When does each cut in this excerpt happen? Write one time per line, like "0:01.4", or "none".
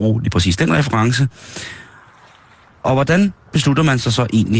none